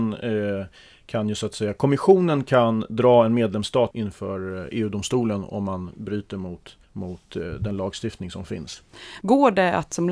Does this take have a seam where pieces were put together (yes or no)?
yes